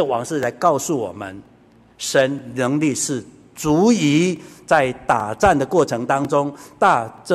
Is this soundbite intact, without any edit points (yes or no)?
yes